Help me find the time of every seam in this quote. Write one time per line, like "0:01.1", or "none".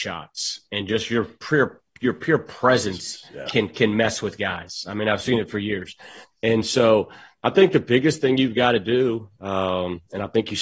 none

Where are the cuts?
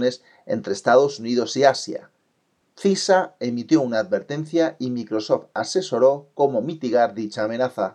none

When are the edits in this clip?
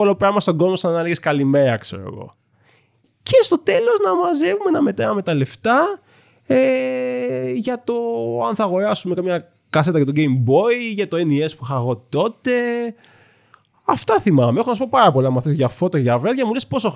none

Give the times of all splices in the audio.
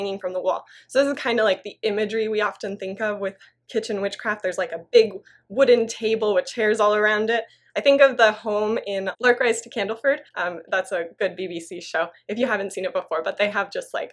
0:10.3

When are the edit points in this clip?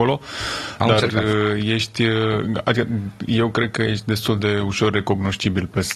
none

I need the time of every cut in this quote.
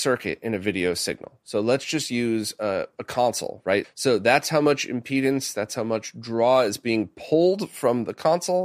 0:03.8

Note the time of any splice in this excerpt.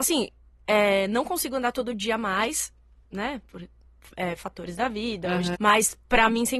0:03.0
0:05.5

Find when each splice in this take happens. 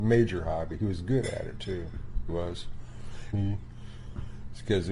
0:02.3
0:03.3

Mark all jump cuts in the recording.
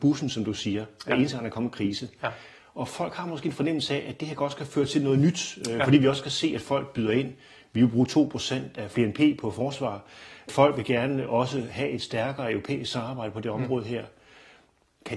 none

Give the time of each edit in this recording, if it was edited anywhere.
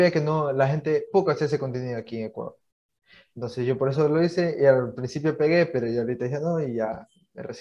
0:01.1

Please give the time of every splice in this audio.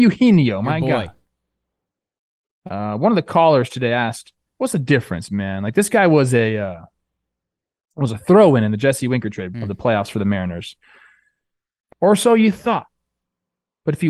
0:09.5
0:11.9

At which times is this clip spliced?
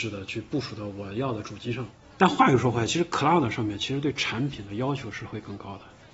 none

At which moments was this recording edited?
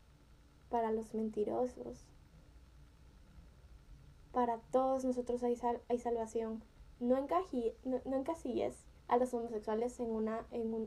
0:09.0

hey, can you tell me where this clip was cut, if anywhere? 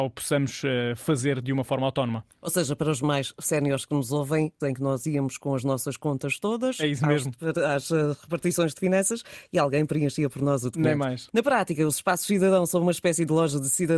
0:04.6
0:11.3

